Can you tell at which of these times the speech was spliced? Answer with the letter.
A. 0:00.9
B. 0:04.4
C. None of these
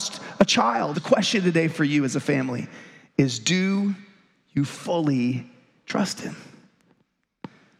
A